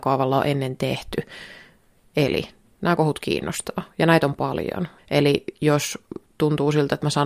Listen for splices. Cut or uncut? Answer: cut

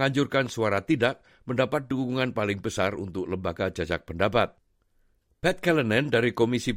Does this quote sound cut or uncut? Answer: uncut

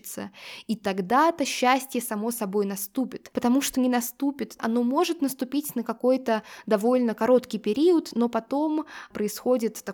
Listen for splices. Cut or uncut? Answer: cut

